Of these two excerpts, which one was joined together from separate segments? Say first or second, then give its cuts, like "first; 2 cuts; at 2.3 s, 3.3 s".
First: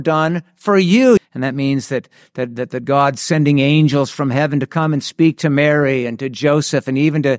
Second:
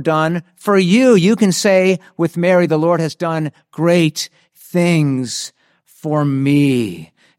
first; 1 cut; at 1.2 s